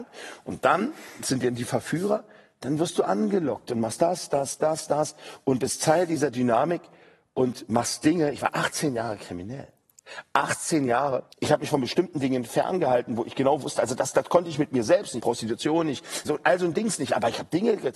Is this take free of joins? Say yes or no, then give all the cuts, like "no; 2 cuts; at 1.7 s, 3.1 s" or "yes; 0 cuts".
no; 3 cuts; at 11.3 s, 15.2 s, 16.3 s